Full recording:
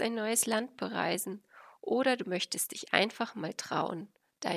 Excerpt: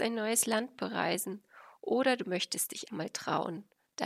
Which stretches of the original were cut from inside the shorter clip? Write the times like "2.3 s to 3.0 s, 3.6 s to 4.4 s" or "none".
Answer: 2.9 s to 3.3 s

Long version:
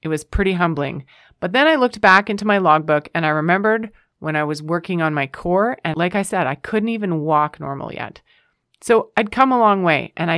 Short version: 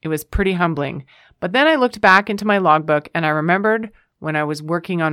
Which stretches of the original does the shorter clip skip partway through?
none

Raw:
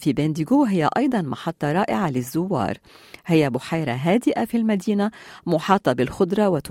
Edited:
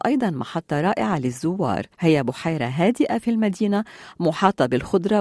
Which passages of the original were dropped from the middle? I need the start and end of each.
2.8 s to 3.2 s

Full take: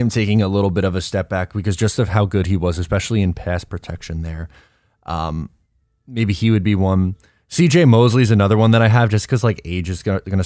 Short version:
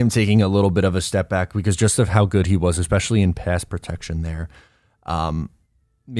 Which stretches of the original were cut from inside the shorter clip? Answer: none

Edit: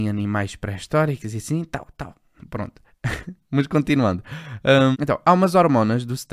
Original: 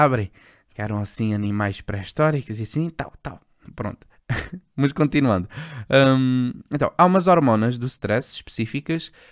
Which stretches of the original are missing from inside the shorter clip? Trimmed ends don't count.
6.2 s to 6.6 s

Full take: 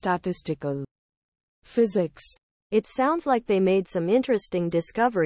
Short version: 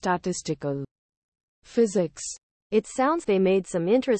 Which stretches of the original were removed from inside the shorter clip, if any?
3.2 s to 3.4 s

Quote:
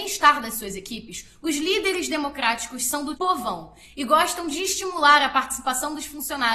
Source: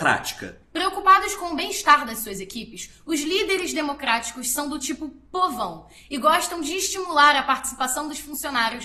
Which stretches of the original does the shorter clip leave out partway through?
4.8 s to 5.3 s

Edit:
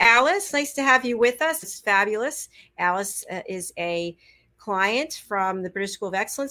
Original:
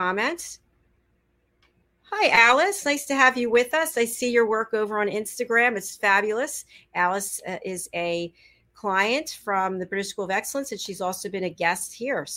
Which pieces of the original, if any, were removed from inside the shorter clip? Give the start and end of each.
3.9 s to 5.8 s

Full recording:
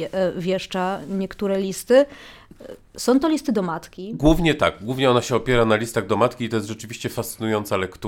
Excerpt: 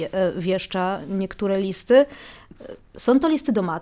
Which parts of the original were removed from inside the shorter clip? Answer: none

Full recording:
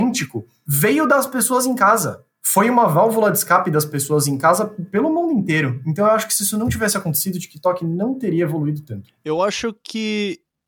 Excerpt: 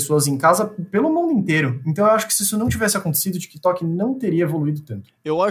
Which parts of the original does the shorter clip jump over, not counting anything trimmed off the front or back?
none

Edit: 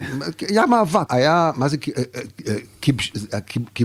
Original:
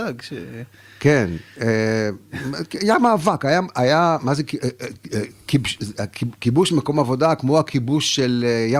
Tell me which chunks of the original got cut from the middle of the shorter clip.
3.4 s to 3.7 s

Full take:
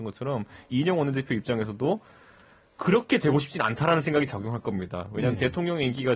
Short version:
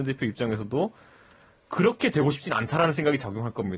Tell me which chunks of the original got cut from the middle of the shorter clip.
none

